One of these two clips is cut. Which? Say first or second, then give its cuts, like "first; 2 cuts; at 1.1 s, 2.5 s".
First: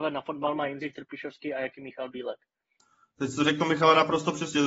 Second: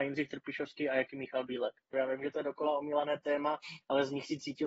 second; 1 cut; at 1.9 s